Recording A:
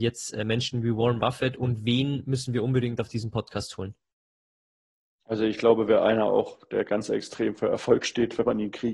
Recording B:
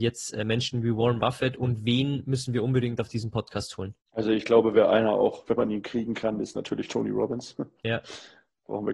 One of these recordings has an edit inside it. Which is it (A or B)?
B